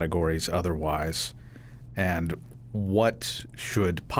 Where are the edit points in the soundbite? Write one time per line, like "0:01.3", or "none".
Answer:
none